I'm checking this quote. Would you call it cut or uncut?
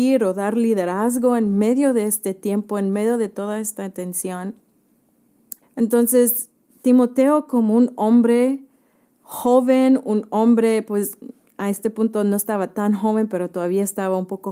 cut